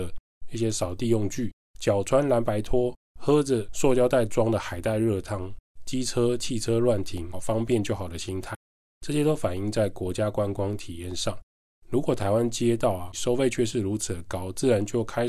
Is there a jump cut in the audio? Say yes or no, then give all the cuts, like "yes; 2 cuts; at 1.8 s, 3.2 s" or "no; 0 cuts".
yes; 2 cuts; at 7.3 s, 13.1 s